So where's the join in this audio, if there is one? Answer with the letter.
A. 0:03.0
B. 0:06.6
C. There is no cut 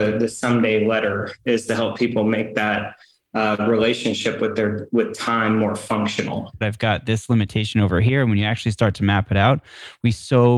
B